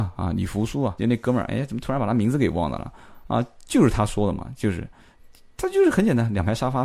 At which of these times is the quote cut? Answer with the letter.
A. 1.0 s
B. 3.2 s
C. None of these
A